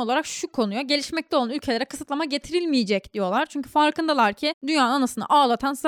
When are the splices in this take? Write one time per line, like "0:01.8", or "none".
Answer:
none